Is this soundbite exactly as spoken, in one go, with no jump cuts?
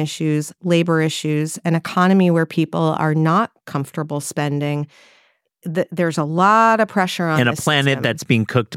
yes; 0 cuts

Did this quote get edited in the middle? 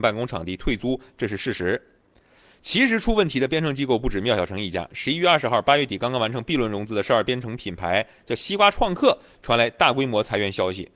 no; 0 cuts

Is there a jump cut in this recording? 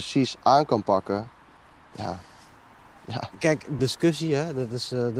yes; 1 cut; at 3.8 s

